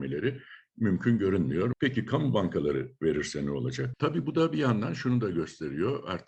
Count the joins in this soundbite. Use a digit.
2